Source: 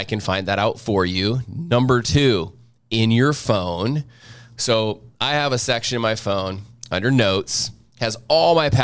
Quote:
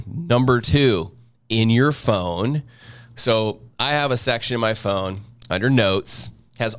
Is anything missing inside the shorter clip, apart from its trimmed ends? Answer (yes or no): no